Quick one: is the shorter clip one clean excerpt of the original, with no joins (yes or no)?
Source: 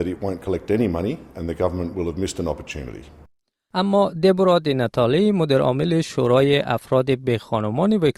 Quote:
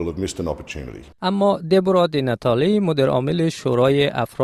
no